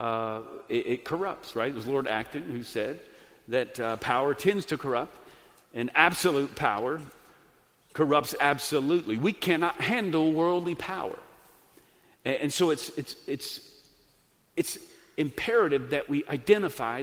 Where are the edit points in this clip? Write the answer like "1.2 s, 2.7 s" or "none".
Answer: 12.4 s